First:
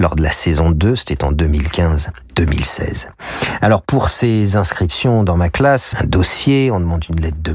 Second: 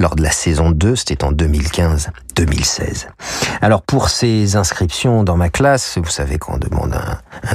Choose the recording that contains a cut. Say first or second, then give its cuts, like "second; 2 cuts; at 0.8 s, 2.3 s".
first; 1 cut; at 5.9 s